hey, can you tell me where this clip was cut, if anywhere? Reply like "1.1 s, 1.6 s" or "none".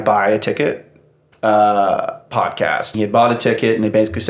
1.3 s, 2.9 s